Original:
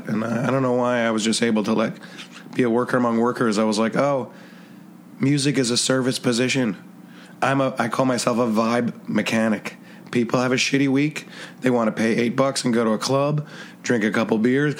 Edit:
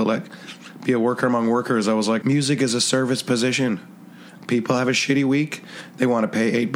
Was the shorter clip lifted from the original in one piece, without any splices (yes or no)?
no